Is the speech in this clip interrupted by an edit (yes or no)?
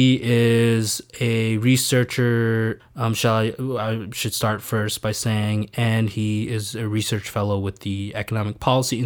yes